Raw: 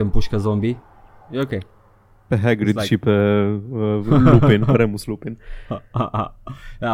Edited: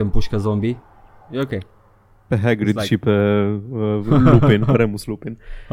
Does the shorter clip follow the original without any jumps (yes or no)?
yes